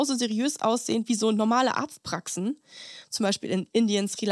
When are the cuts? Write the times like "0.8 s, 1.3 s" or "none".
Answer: 3.0 s